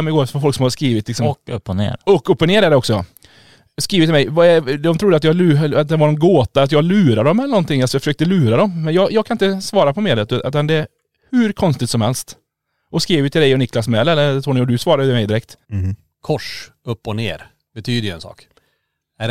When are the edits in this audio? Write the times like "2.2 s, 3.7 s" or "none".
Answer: 15.6 s